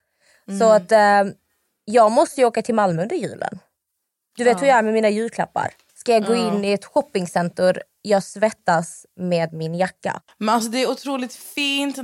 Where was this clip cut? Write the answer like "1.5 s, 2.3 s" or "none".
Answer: 5.9 s